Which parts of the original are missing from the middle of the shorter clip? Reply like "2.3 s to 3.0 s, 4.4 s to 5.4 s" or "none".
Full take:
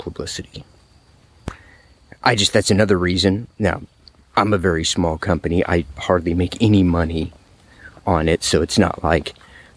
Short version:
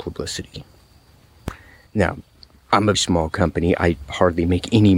1.9 s to 3.5 s, 4.6 s to 4.8 s